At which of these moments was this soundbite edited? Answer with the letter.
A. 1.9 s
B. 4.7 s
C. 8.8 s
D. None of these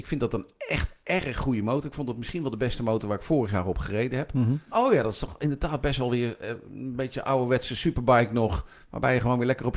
B